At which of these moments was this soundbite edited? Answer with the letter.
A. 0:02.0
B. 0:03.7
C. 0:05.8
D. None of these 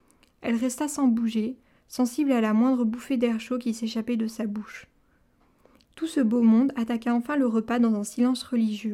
C